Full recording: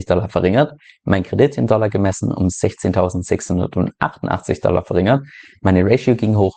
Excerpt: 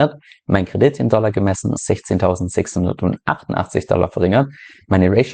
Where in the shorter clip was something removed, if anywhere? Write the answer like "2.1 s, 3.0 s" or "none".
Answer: 1.8 s